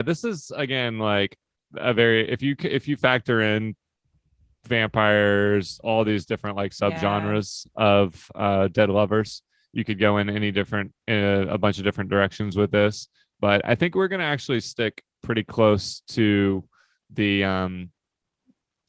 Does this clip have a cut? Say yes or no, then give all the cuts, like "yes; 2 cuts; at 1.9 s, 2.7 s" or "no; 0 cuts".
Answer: no; 0 cuts